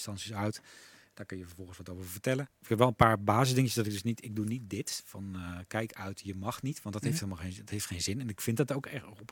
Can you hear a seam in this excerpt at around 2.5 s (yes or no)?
yes